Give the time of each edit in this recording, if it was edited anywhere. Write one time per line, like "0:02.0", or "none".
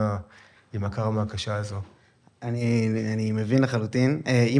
none